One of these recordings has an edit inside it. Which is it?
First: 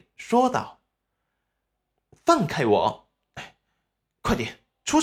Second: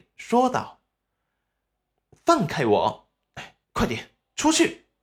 second; 1 cut; at 3.6 s

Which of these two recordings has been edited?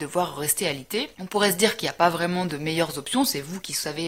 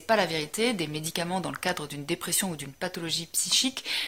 first; 1 cut; at 1.1 s

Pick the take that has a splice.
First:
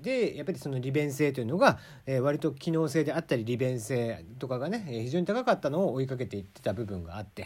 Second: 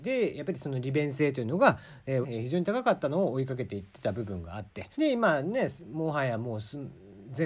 second; 2 cuts; at 2.2 s, 4.9 s

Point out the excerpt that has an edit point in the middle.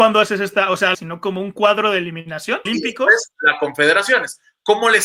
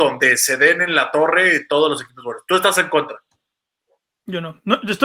first; 2 cuts; at 0.9 s, 2.7 s

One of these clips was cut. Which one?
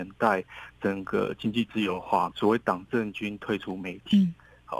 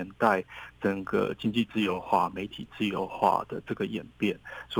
first; 1 cut; at 2.3 s

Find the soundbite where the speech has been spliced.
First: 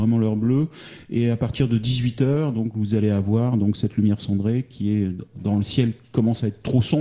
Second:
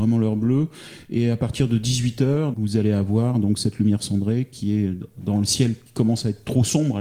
second; 1 cut; at 2.5 s

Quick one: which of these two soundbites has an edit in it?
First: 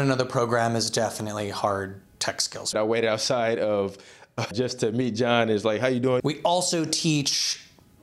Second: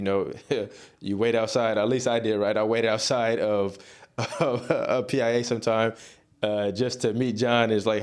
first; 3 cuts; at 2.7 s, 4.5 s, 6.2 s

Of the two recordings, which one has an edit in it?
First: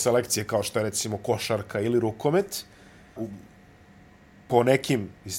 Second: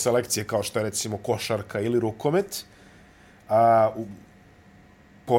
first; 1 cut; at 3.2 s

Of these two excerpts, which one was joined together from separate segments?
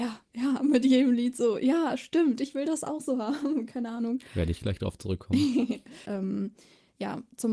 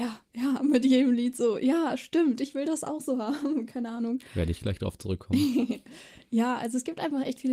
first; 1 cut; at 6.1 s

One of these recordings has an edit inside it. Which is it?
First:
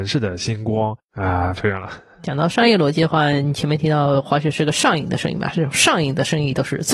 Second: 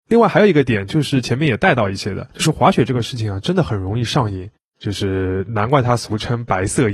first; 1 cut; at 1.6 s

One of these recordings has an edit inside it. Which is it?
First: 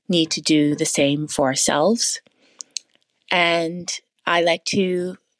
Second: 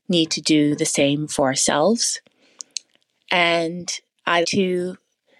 second; 1 cut; at 4.4 s

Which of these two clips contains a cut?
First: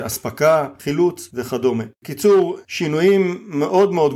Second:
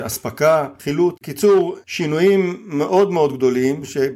second; 1 cut; at 1.1 s

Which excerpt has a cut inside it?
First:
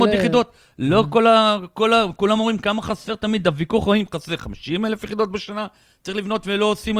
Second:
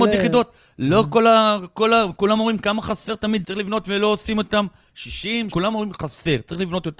second; 2 cuts; at 3.4 s, 5.5 s

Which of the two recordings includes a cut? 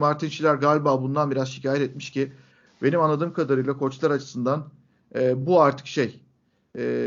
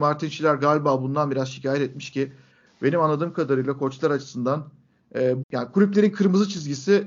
second; 1 cut; at 5.4 s

